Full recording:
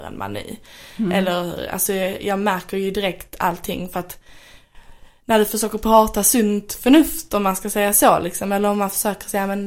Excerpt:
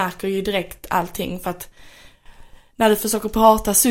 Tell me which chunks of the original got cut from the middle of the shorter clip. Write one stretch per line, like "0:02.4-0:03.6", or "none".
none